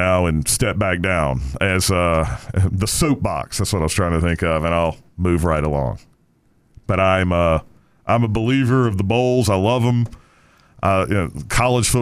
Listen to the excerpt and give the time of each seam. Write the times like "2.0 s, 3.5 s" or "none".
none